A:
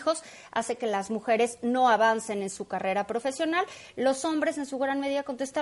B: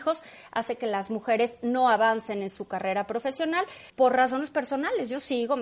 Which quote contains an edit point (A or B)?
B